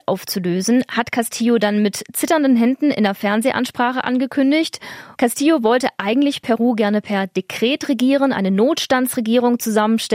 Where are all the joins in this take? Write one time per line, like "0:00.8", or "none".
0:05.1